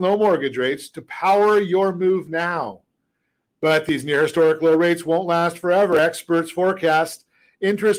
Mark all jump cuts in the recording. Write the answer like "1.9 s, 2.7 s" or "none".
none